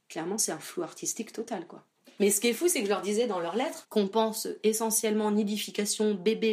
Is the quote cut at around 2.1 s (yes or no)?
no